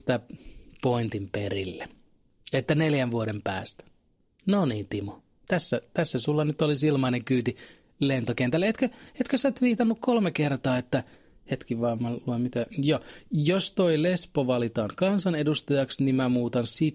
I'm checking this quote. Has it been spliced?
no; 0 cuts

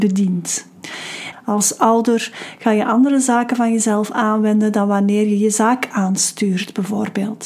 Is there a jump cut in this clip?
yes; 1 cut; at 1.3 s

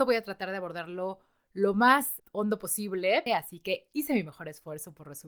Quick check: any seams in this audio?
yes; 2 cuts; at 2.2 s, 3.3 s

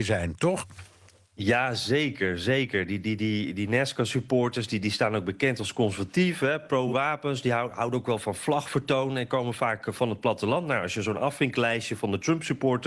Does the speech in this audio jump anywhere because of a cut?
no; 0 cuts

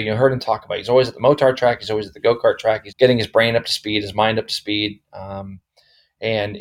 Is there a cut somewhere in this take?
yes; 1 cut; at 2.9 s

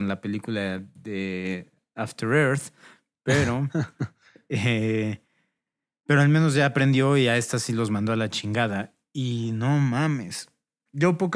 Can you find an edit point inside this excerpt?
no; 0 cuts

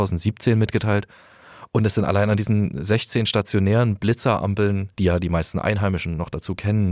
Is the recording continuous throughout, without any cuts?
no; 1 cut; at 4.9 s

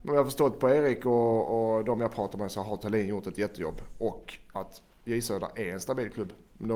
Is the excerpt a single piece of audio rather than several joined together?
yes; 0 cuts

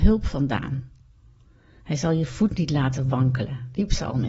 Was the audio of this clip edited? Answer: no; 0 cuts

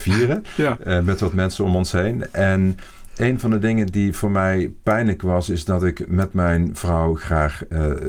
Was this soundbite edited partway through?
no; 0 cuts

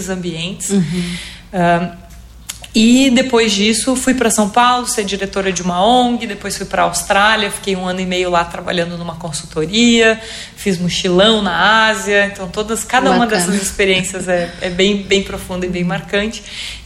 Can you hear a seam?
no; 0 cuts

